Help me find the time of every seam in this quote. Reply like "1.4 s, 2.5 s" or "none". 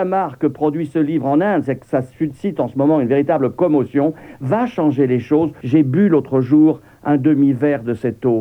5.6 s